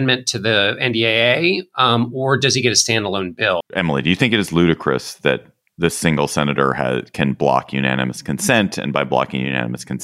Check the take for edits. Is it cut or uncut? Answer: cut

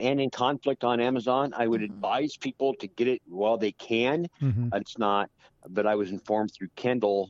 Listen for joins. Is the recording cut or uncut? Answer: cut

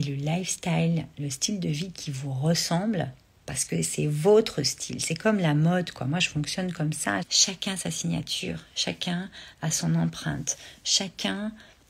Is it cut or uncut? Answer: cut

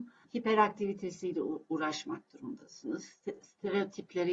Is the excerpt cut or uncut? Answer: uncut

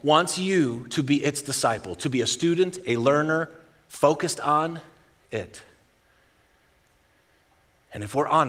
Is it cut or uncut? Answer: uncut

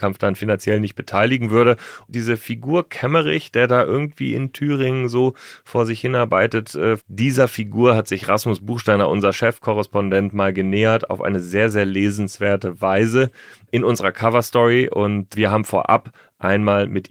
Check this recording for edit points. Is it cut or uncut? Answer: cut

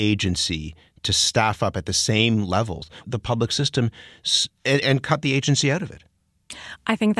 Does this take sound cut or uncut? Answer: cut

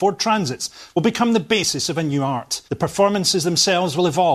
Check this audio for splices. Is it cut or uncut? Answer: cut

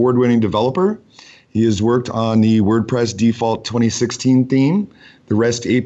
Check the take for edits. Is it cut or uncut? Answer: uncut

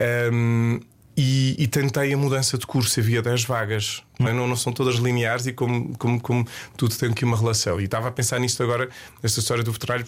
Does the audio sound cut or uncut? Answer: cut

